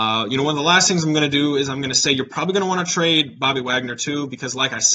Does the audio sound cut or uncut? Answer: uncut